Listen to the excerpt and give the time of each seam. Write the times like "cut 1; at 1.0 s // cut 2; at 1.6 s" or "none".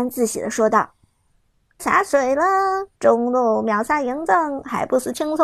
cut 1; at 1.8 s // cut 2; at 2.9 s